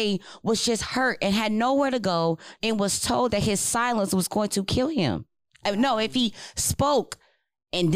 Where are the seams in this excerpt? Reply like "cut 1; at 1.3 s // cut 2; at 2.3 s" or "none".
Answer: cut 1; at 2.6 s